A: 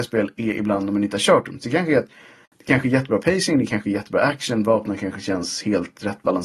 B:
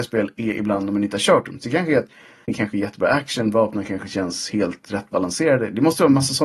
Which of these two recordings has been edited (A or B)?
B